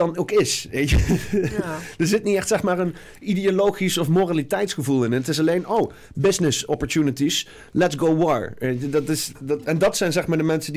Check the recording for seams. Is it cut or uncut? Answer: cut